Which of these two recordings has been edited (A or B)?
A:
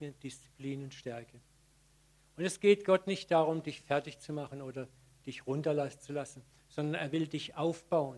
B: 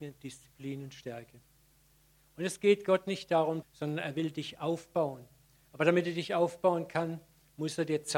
B